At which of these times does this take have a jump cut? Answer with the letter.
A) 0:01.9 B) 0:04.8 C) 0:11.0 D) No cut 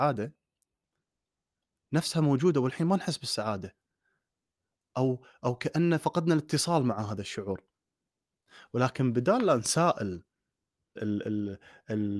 C